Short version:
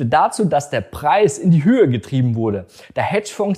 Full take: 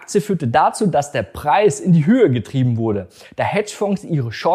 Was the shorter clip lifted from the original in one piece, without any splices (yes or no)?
yes